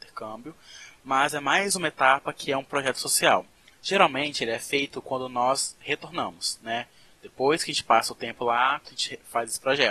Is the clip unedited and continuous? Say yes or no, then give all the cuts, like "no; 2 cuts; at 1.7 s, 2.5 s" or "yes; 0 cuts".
no; 1 cut; at 8.8 s